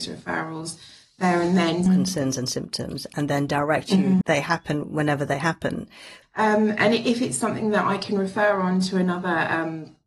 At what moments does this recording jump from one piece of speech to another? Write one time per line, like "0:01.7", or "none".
0:01.9
0:04.2
0:06.2